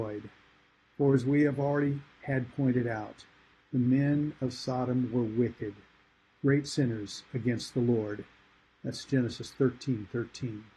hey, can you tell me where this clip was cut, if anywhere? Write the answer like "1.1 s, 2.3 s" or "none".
none

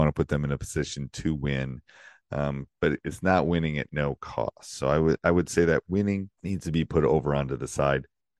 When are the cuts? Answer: 6.3 s

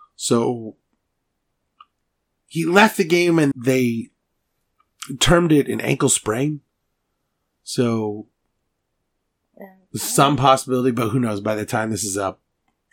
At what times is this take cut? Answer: 3.5 s

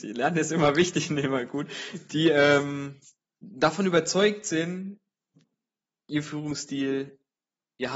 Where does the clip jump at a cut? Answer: none

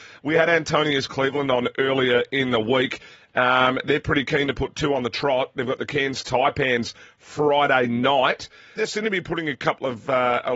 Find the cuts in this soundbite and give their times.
8.8 s

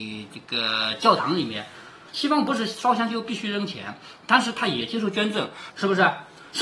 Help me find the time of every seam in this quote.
2.1 s, 5.7 s

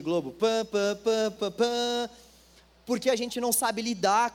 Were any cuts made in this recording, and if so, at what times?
1.4 s

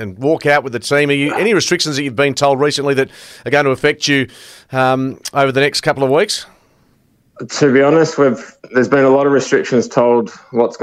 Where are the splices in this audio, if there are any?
none

